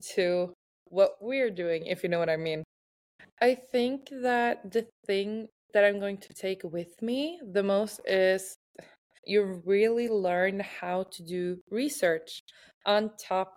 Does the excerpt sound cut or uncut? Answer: cut